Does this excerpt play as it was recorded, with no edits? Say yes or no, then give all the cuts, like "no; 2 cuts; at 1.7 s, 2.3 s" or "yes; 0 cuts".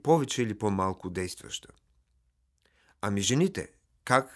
yes; 0 cuts